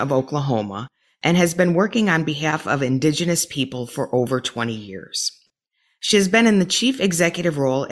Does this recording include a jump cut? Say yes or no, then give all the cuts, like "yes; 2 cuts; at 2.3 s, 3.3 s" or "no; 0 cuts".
no; 0 cuts